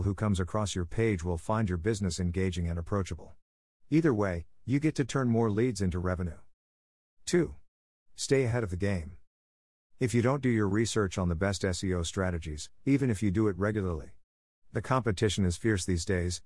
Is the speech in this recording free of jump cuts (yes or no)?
no